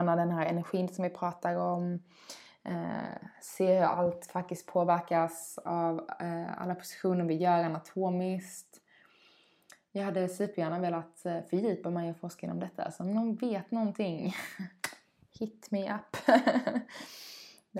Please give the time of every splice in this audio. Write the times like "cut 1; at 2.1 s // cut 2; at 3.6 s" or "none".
none